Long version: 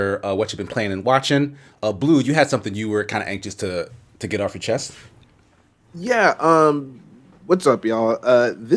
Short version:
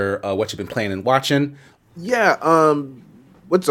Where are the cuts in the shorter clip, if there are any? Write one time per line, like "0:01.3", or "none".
0:01.8